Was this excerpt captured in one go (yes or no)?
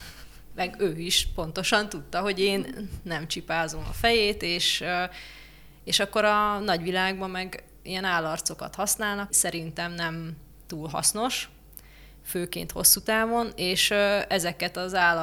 no